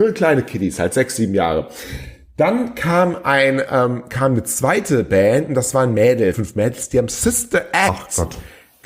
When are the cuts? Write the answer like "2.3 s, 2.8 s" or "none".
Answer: 6.3 s